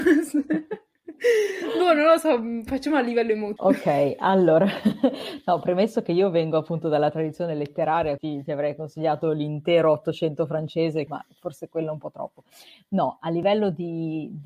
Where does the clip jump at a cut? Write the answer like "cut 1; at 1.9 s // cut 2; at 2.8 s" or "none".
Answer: cut 1; at 3.6 s // cut 2; at 8.2 s // cut 3; at 11.1 s